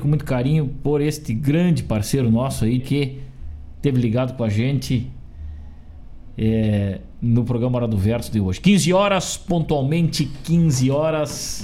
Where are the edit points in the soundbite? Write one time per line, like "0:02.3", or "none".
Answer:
0:02.8